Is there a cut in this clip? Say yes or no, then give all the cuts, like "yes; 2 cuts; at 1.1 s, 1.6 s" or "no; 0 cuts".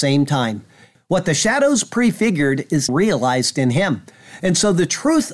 yes; 2 cuts; at 0.9 s, 2.9 s